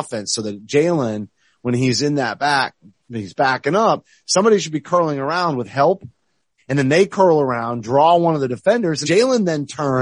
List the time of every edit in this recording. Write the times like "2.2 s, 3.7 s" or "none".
6.6 s, 9.0 s